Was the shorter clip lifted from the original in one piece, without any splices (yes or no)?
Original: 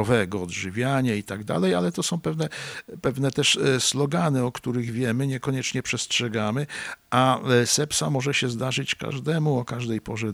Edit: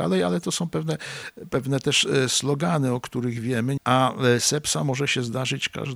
no